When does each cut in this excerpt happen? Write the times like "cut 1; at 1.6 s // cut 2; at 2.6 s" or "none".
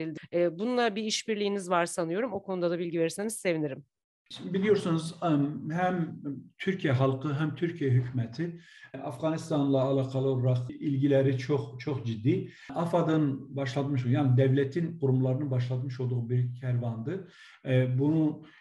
none